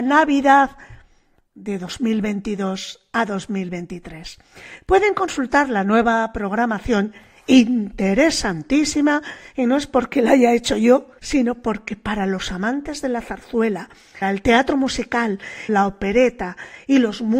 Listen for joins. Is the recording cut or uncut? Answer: cut